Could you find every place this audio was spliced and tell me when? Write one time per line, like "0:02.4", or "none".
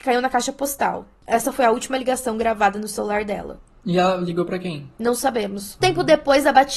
0:05.8